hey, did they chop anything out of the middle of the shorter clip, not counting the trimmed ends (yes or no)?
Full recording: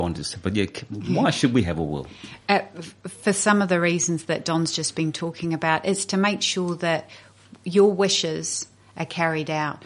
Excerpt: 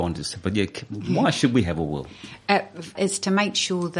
yes